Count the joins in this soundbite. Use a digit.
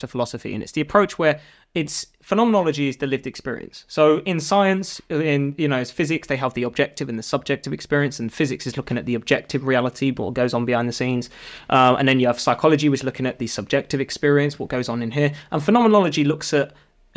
0